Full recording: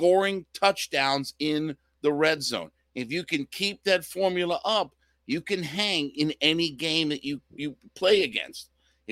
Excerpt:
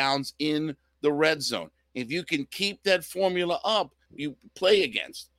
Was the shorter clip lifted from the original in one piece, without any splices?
no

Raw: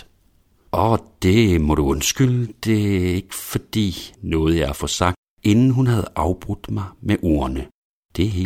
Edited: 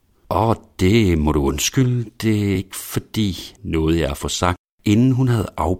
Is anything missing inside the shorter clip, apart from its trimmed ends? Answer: yes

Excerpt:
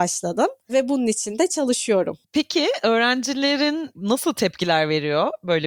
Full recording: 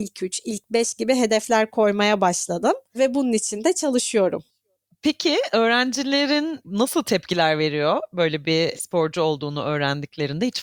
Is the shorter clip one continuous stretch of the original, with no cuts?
no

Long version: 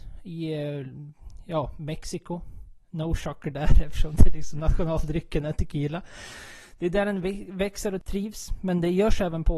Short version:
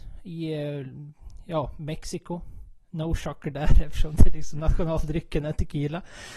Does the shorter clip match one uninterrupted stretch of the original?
yes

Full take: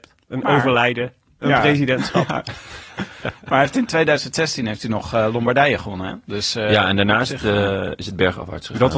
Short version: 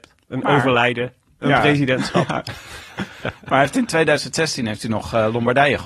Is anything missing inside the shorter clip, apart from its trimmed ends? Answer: no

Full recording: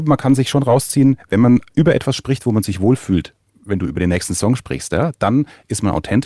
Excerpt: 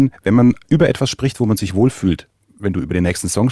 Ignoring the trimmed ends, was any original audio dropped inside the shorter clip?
no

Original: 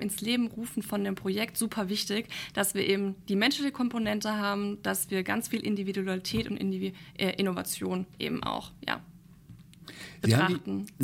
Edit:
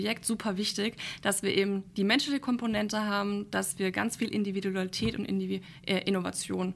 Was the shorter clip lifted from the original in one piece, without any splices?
yes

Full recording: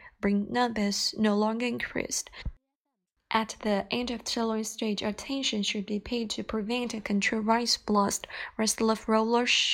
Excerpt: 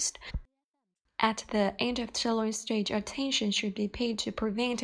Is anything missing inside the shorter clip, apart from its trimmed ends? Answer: no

